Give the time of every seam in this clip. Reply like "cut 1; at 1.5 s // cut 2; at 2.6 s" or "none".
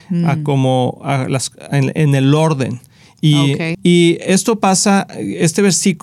cut 1; at 3.7 s